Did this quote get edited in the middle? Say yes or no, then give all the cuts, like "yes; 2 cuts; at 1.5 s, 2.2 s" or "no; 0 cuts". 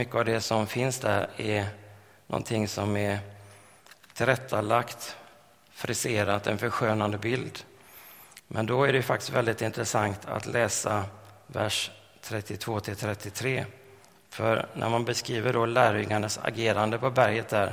no; 0 cuts